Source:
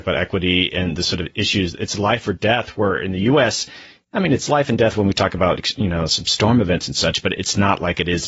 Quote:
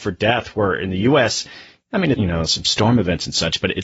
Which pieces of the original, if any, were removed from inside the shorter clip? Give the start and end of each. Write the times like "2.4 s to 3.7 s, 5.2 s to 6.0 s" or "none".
4.4 s to 5.8 s